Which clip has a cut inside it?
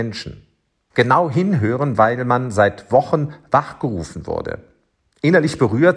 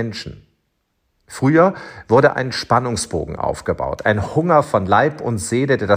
first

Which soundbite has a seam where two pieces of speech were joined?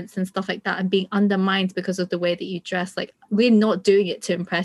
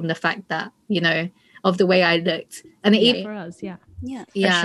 second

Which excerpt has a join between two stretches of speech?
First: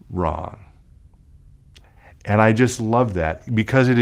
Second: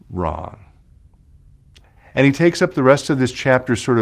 second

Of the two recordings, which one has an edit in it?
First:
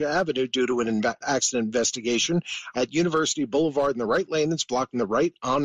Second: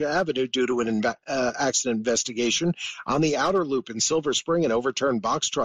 first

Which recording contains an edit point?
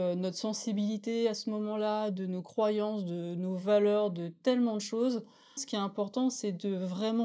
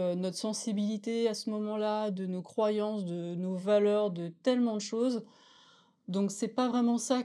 first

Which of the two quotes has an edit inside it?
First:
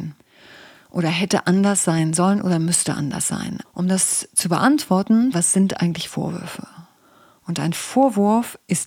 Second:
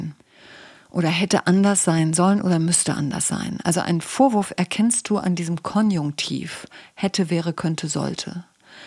first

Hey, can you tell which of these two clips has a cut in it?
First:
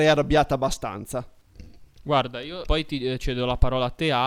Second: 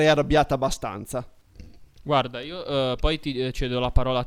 first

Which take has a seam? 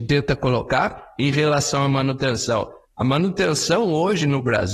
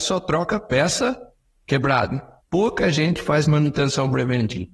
second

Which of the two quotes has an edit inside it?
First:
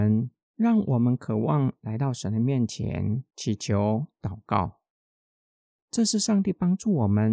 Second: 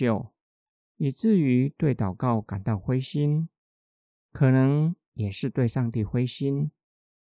first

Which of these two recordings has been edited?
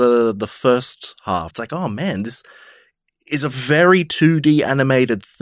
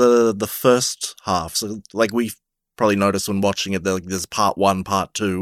first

